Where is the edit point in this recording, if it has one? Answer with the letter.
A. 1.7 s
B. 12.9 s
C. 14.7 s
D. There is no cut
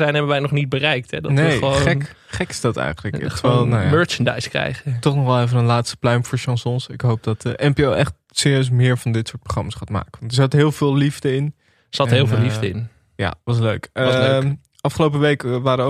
D